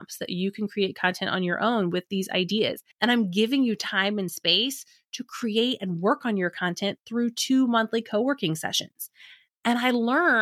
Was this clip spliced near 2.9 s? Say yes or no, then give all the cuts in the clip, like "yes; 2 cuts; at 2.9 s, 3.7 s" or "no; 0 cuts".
yes; 1 cut; at 2.9 s